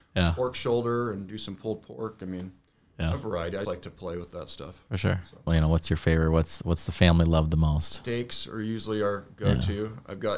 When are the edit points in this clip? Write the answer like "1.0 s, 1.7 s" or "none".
3.6 s, 5.5 s